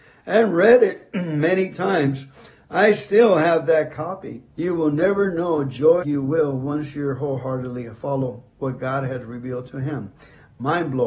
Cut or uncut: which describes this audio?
cut